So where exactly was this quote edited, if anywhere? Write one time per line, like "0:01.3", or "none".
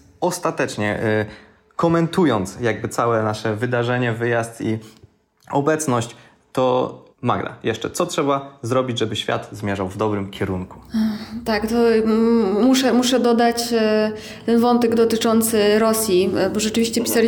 0:07.1